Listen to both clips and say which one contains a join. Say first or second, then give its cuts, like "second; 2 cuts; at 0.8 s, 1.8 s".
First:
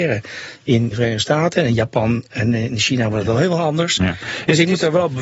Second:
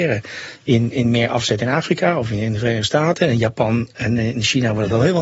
first; 1 cut; at 0.9 s